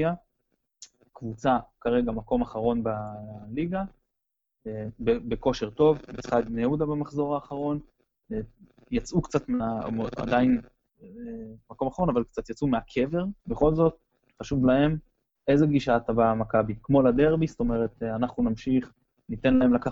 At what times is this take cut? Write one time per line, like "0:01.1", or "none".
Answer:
0:13.4